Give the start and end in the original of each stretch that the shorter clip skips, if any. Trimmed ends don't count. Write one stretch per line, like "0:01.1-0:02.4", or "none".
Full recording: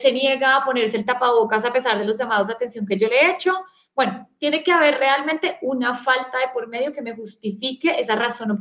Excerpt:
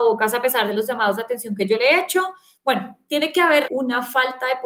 0:05.0-0:05.6

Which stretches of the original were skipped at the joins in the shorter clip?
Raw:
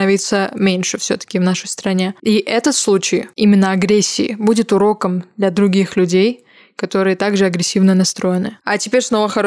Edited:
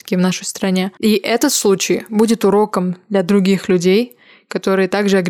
0:03.3-0:04.4

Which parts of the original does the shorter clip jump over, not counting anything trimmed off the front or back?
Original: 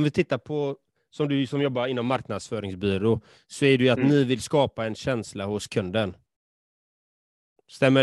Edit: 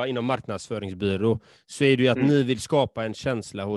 none

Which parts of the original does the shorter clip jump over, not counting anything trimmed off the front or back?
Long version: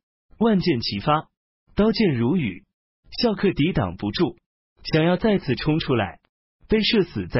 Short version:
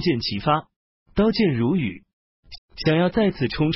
0:03.1-0:04.6

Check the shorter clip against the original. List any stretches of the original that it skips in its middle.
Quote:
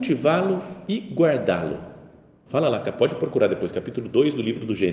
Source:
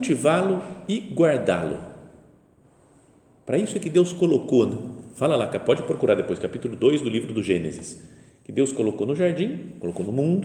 0:02.5-0:05.1

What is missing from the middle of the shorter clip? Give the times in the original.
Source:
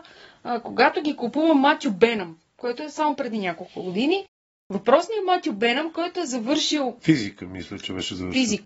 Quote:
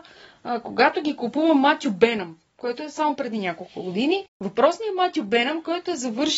0:04.3-0:04.6

